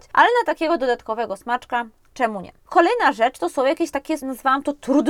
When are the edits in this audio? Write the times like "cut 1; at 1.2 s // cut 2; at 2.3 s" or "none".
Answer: cut 1; at 2.7 s // cut 2; at 4.2 s